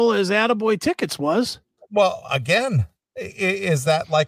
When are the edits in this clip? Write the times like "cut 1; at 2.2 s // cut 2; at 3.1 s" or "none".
none